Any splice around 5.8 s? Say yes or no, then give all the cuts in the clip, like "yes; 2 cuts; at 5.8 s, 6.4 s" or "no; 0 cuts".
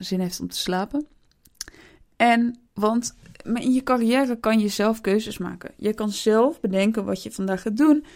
no; 1 cut; at 2.7 s